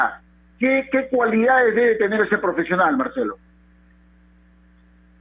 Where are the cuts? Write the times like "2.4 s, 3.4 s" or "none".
none